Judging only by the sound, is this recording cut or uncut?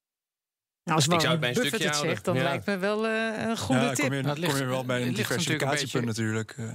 uncut